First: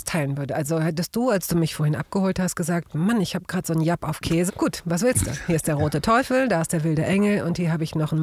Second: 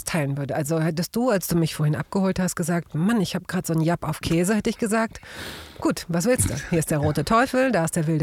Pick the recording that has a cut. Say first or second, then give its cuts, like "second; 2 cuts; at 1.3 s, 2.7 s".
first; 1 cut; at 4.5 s